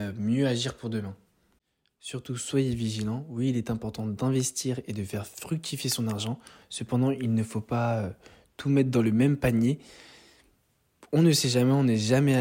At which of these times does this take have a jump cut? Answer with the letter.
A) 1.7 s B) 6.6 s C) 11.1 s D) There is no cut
D